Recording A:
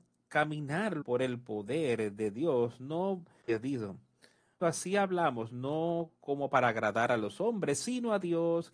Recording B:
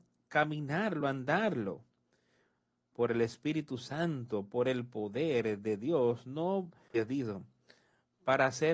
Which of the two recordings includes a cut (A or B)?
A